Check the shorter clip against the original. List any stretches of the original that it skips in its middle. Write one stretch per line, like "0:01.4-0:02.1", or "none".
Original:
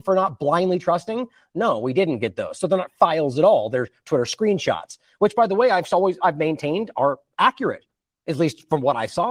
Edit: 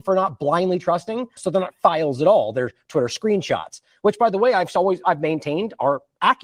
0:01.4-0:02.5